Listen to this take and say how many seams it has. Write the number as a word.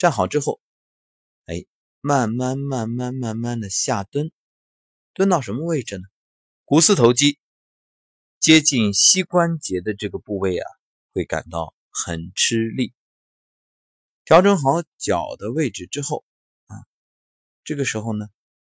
two